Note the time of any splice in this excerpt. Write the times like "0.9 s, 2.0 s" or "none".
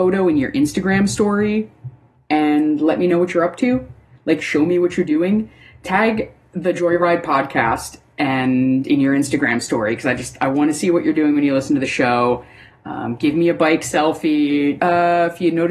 14.8 s